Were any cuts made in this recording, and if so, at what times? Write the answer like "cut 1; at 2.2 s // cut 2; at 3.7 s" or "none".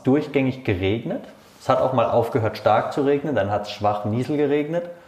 none